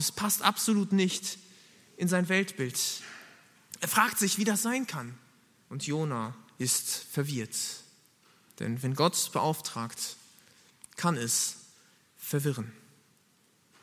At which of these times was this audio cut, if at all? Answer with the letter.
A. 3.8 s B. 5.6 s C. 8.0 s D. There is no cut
B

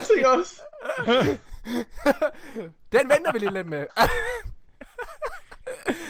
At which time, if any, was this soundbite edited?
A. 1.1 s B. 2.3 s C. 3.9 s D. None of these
C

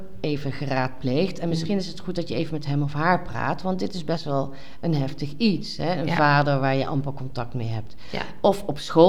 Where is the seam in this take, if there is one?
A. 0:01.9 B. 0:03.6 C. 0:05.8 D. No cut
D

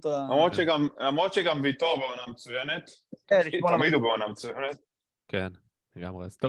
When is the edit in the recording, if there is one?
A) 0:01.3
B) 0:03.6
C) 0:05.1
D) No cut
C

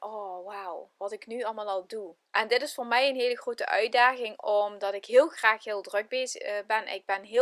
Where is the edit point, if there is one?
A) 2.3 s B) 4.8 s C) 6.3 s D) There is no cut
A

